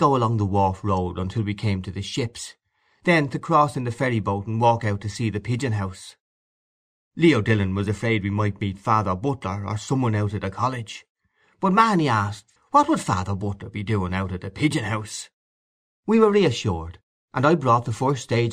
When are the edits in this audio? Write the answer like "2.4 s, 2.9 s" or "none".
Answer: 12.6 s